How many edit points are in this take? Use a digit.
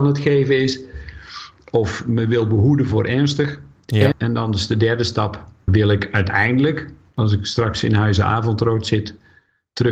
2